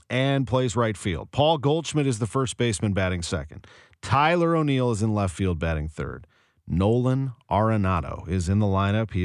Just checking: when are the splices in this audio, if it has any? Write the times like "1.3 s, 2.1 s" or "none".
none